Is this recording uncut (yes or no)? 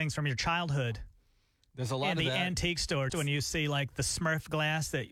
no